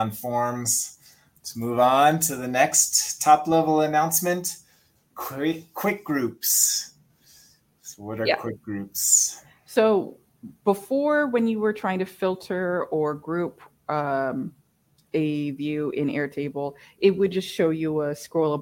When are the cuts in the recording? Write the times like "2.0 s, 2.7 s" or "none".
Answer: none